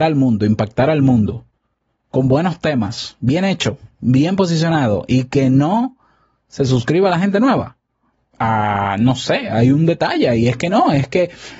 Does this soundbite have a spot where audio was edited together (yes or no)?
no